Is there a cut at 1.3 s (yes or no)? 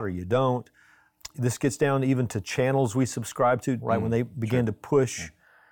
no